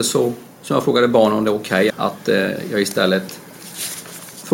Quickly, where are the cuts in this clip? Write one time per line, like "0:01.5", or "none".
0:01.9